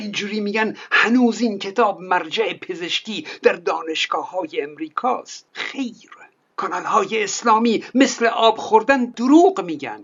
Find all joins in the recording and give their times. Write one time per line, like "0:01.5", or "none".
none